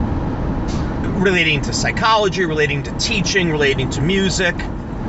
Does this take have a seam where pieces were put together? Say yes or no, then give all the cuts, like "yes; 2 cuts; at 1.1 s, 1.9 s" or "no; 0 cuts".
no; 0 cuts